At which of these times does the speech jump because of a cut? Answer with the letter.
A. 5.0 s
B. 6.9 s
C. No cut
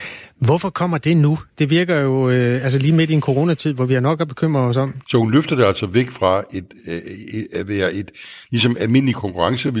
A